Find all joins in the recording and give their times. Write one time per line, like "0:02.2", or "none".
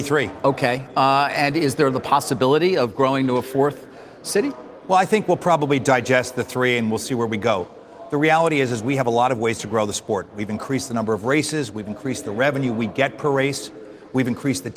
none